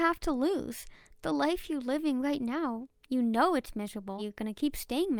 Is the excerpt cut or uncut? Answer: cut